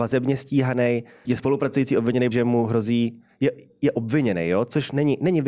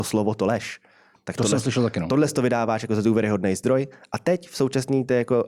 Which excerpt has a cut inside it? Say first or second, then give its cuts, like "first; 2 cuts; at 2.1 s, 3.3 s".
first; 2 cuts; at 1.2 s, 2.3 s